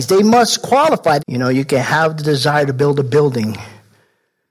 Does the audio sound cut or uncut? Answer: cut